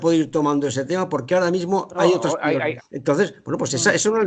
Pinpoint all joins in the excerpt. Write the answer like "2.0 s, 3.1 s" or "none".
2.8 s